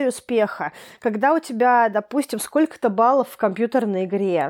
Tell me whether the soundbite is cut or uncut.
uncut